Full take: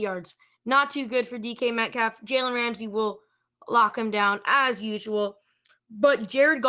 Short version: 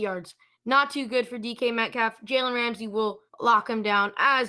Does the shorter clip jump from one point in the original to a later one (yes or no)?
yes